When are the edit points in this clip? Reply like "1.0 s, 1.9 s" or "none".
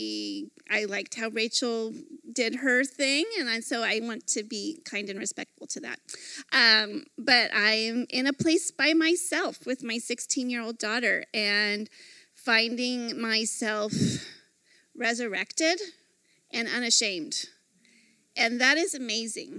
none